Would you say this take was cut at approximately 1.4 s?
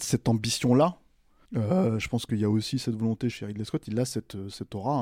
yes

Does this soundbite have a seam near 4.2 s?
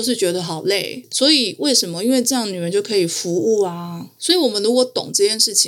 yes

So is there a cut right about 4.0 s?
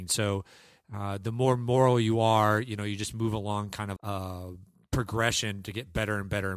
yes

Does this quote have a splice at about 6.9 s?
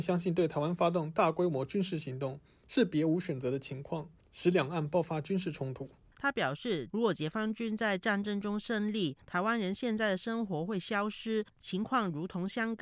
yes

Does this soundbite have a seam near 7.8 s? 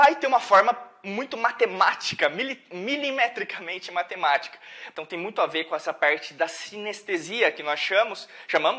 no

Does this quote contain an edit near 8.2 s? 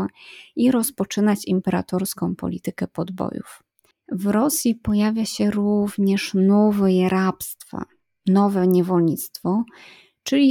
no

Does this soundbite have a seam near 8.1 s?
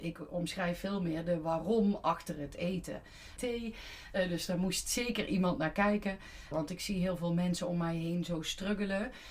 no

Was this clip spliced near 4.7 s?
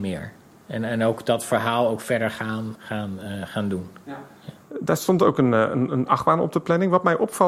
no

